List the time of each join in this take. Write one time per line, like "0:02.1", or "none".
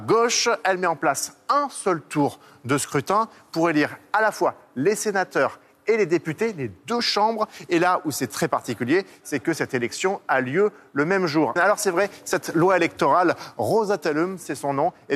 0:11.6